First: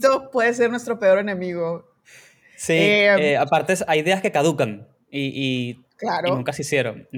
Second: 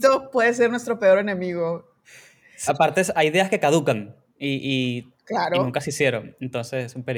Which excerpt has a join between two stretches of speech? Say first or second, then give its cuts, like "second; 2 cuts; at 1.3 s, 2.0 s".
second; 1 cut; at 2.7 s